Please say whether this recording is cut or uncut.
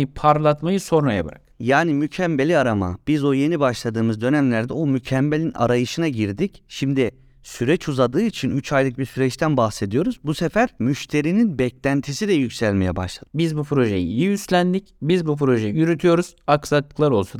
cut